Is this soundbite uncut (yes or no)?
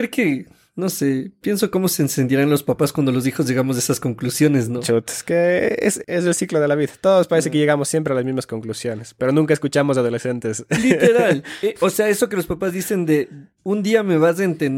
no